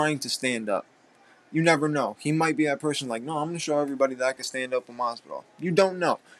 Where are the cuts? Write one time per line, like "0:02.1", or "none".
none